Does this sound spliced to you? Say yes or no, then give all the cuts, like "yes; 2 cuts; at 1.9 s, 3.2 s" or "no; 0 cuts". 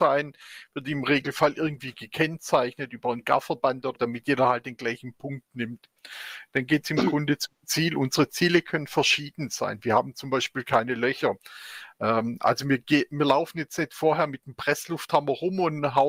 yes; 1 cut; at 4.0 s